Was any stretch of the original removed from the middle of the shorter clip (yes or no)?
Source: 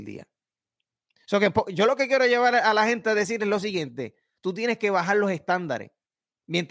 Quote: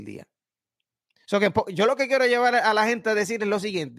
no